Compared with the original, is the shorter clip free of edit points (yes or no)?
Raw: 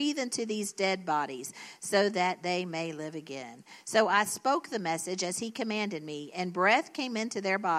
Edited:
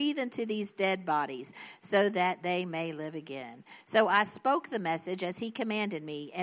yes